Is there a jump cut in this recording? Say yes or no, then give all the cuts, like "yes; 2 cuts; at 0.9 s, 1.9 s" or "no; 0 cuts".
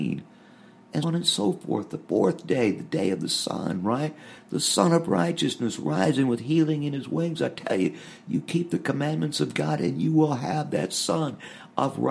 yes; 1 cut; at 1.0 s